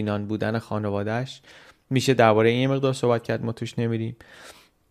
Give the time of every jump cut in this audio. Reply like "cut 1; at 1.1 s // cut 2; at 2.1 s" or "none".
none